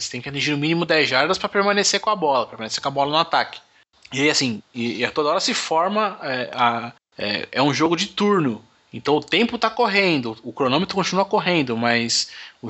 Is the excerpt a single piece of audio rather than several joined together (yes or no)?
yes